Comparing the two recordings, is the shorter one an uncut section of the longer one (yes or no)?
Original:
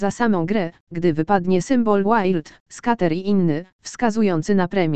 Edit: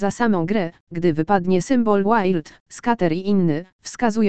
yes